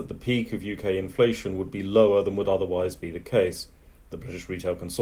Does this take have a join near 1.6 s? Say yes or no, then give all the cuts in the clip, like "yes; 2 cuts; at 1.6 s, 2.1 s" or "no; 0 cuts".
no; 1 cut; at 4.0 s